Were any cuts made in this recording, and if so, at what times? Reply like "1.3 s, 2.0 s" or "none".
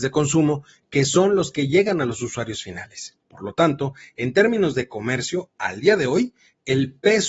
3.2 s